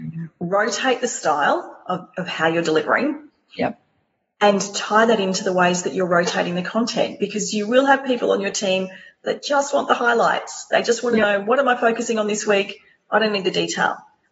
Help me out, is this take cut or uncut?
uncut